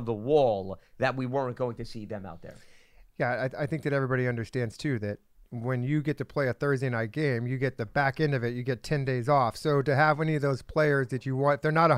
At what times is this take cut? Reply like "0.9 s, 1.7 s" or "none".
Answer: none